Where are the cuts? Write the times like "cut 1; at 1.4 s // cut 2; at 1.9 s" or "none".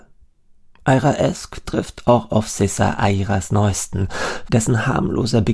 cut 1; at 4.5 s